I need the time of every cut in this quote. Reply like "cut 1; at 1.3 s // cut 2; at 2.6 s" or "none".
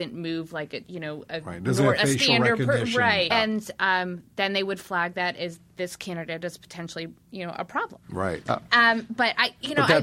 cut 1; at 3.3 s // cut 2; at 8.5 s